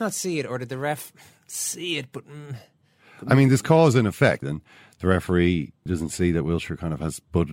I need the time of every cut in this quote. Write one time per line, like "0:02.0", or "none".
0:04.4
0:05.9